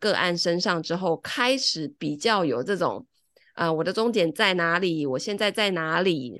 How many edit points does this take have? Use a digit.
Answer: 0